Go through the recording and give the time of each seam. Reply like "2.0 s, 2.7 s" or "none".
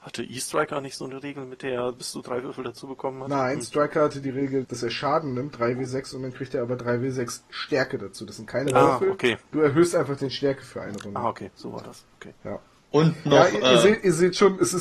4.6 s